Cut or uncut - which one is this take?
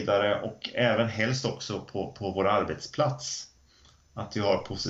uncut